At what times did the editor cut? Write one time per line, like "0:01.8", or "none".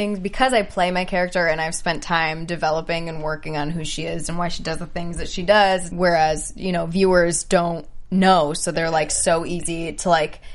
0:05.9